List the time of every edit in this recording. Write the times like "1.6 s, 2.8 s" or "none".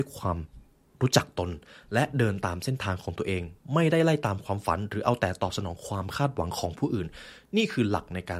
none